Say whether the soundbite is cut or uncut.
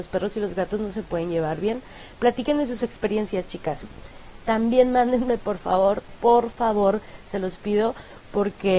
cut